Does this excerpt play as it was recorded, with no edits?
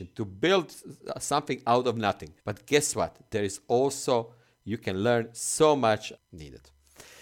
no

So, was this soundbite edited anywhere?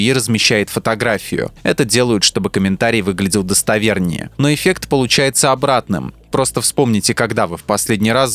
no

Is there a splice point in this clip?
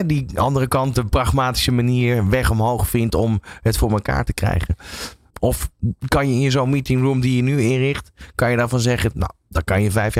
yes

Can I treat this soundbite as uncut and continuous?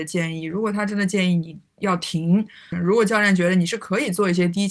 no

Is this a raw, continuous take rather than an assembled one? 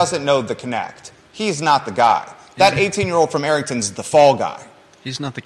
yes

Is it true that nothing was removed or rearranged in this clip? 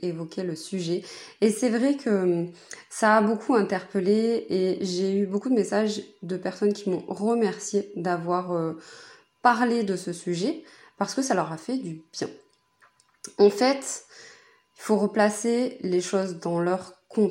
yes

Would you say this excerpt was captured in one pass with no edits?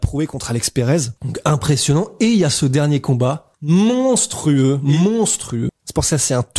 no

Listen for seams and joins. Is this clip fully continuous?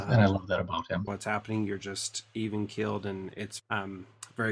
no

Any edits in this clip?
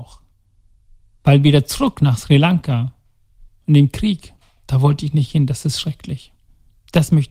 no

